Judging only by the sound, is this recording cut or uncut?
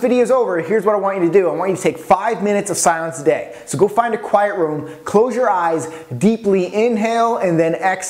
uncut